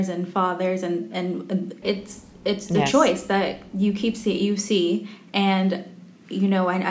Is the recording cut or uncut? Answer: cut